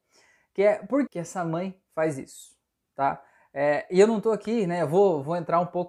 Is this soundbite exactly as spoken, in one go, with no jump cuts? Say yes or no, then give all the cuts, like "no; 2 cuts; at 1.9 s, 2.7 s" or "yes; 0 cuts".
no; 1 cut; at 1.1 s